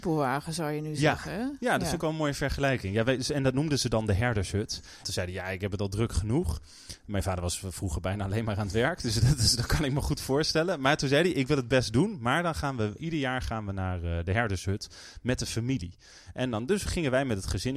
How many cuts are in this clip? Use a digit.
2